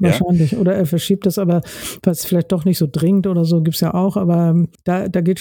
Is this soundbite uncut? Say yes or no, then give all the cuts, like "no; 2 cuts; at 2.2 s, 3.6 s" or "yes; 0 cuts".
yes; 0 cuts